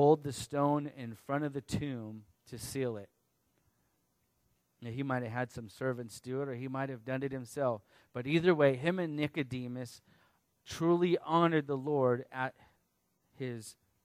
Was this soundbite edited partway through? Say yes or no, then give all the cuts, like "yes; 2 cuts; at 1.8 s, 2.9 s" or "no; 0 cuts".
no; 0 cuts